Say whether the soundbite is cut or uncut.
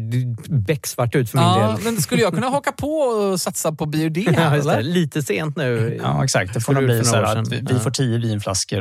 uncut